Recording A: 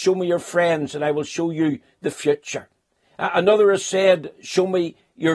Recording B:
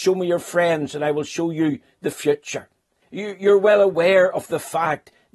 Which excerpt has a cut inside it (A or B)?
B